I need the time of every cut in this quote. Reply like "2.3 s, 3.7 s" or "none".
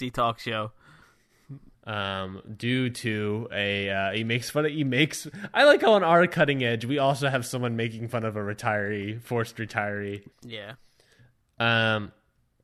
1.7 s, 10.3 s